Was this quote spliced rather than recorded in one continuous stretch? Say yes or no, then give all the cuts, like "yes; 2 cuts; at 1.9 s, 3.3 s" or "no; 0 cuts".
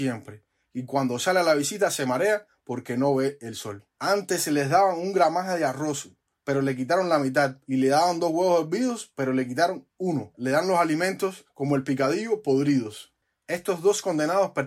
yes; 1 cut; at 4.0 s